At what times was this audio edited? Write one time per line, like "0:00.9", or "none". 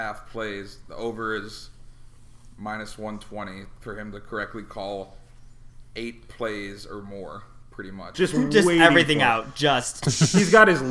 0:08.1